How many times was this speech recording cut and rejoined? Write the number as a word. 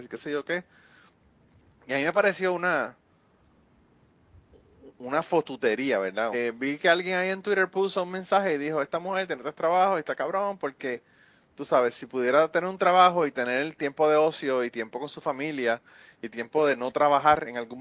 one